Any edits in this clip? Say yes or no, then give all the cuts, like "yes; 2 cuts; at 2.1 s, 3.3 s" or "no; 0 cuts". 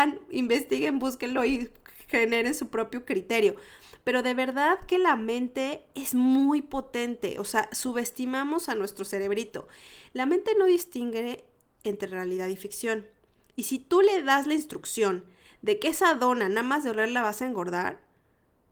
no; 0 cuts